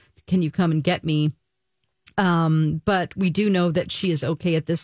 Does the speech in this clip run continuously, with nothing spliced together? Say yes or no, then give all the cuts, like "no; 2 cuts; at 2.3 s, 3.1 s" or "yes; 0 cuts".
yes; 0 cuts